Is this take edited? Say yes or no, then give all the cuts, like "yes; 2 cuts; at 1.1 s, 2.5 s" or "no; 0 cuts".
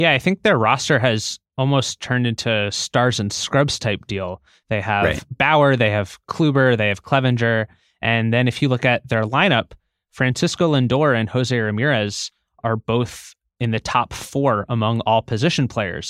no; 0 cuts